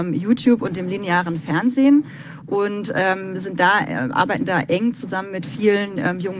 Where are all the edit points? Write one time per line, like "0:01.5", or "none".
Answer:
none